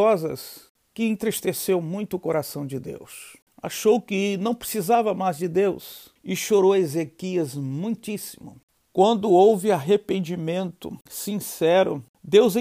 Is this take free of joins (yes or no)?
no